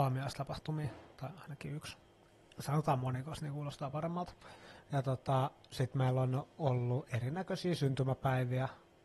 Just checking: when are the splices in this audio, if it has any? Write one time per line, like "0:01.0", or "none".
none